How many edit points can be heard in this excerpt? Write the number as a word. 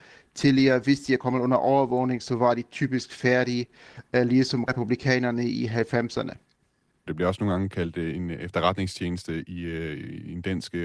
one